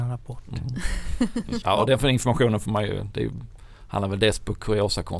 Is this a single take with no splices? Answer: no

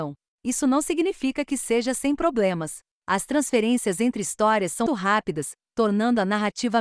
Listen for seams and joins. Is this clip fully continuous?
no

